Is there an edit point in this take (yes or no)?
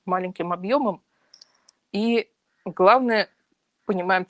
no